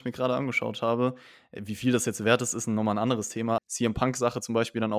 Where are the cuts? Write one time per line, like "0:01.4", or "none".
0:03.6